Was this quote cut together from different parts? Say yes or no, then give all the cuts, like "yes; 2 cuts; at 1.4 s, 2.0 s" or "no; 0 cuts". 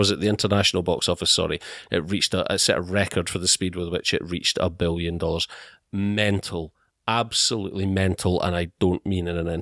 no; 0 cuts